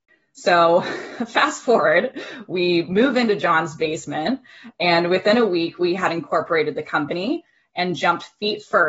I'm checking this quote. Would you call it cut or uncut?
uncut